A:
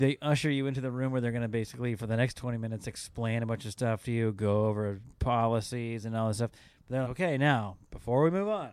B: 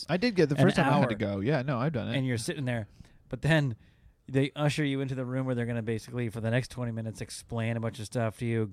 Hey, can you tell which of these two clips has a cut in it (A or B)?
A